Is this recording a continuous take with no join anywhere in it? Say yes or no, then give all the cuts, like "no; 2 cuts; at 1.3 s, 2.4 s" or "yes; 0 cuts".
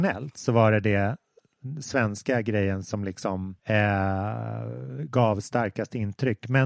no; 1 cut; at 3.6 s